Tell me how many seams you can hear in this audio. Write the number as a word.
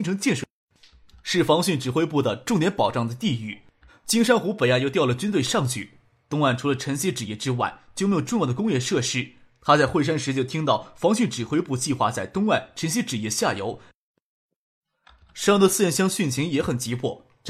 one